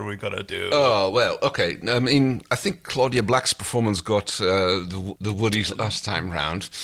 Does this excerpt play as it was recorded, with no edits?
no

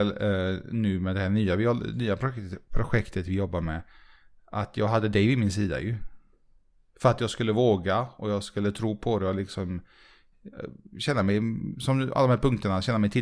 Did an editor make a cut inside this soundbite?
no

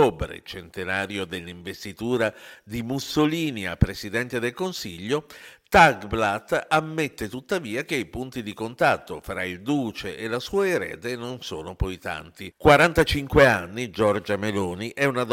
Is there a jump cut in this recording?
no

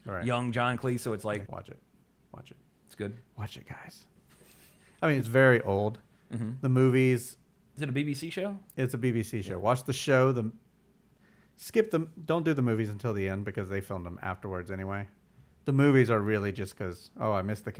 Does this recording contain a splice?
yes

